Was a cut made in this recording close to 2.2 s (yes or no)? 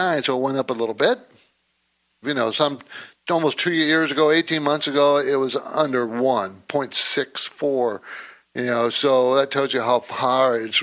yes